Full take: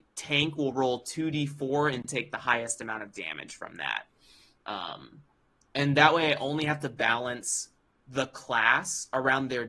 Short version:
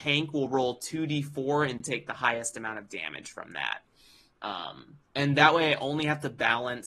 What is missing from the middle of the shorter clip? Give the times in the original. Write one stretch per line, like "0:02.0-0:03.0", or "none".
0:05.3-0:05.6